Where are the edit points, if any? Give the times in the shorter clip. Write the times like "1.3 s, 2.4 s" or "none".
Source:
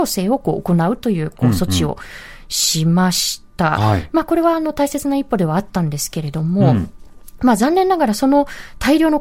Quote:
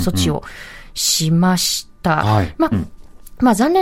2.7 s